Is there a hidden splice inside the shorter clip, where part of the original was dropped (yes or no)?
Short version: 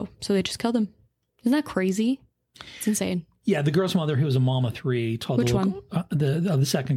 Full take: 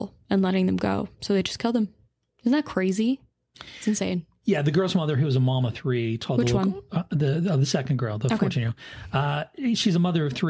no